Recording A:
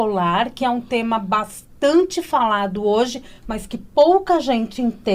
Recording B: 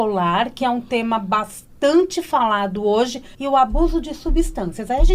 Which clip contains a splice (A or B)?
B